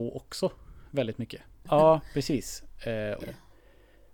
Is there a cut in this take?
yes; 2 cuts; at 1.7 s, 3.2 s

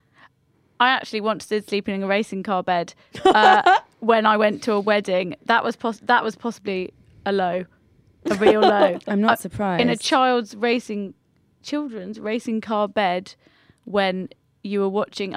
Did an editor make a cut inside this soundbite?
no; 0 cuts

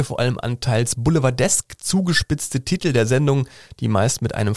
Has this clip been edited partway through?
no; 0 cuts

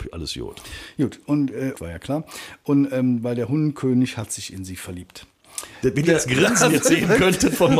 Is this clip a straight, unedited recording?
no; 2 cuts; at 1.7 s, 5.8 s

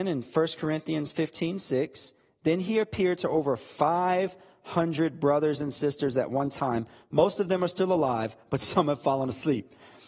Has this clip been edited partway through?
no; 0 cuts

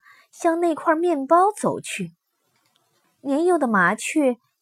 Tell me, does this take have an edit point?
yes; 1 cut; at 3.0 s

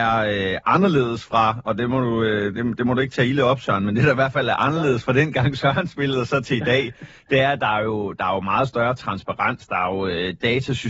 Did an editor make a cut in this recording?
no; 0 cuts

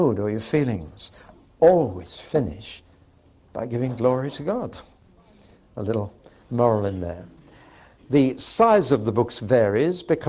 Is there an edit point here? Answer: no; 0 cuts

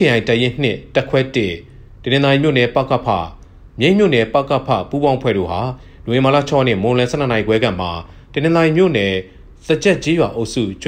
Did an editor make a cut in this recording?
no; 0 cuts

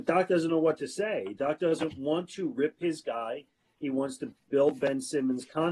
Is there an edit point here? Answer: no; 0 cuts

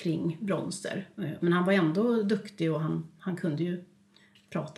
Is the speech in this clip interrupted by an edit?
yes; 1 cut; at 1.4 s

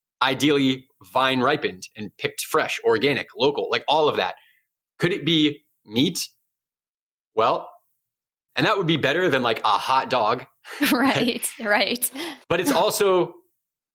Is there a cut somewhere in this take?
yes; 2 cuts; at 8.5 s, 12.4 s

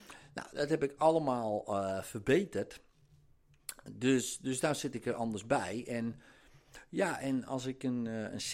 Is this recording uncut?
yes; 0 cuts

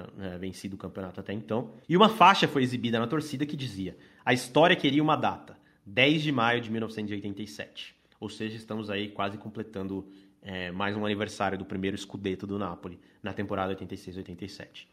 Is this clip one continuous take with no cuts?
no; 1 cut; at 1.8 s

